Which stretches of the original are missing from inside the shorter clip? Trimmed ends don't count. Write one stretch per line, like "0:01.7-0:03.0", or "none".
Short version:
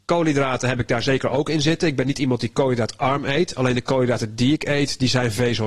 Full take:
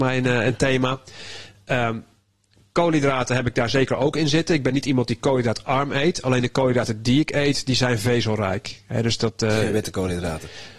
none

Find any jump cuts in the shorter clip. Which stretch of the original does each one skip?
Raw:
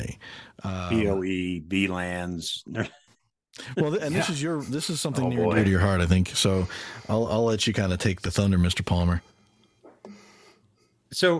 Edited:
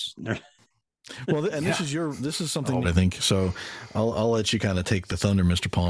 0:05.3-0:06.0

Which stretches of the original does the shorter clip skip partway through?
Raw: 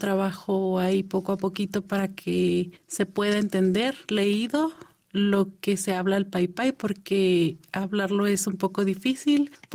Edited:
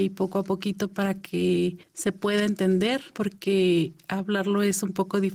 0:04.0-0:06.7

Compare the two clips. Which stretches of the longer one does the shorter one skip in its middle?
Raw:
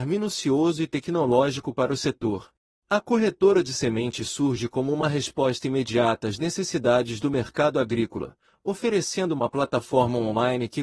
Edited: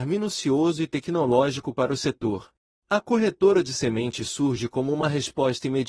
none

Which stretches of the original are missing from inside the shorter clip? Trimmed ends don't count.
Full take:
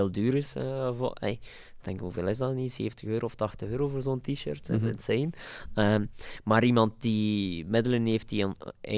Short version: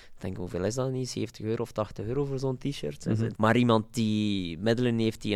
0:05.0-0:06.4

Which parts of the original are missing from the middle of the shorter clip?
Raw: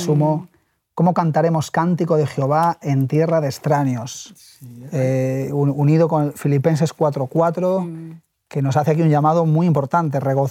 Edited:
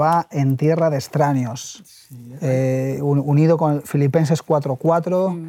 none

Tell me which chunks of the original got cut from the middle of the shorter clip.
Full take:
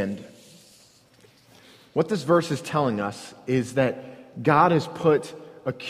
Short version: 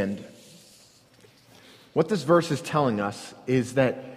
none

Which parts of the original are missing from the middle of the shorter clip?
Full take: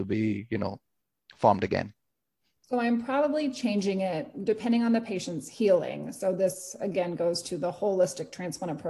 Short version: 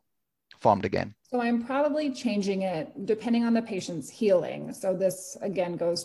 0:02.0-0:02.6

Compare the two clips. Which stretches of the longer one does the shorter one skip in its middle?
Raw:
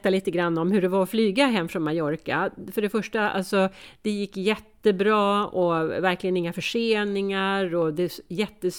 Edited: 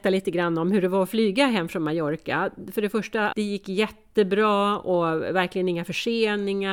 0:03.3-0:04.0

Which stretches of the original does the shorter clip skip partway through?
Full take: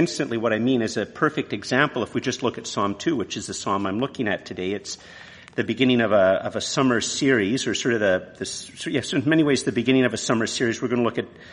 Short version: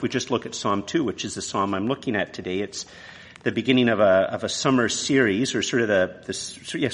none

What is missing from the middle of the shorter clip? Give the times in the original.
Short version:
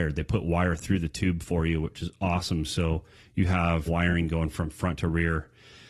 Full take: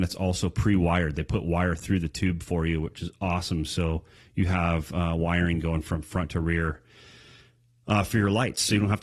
0:04.9-0:05.2

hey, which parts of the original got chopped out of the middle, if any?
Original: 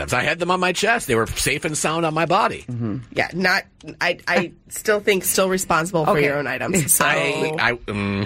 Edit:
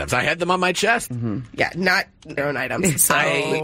0:01.1-0:02.6
0:04.0-0:06.3

